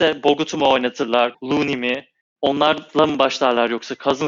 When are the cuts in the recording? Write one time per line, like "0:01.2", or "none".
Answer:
0:01.3